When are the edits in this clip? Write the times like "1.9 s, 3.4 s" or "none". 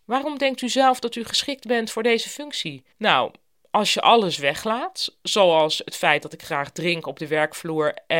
2.9 s